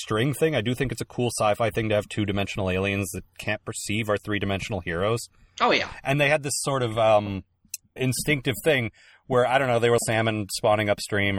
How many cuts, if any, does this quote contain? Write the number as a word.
two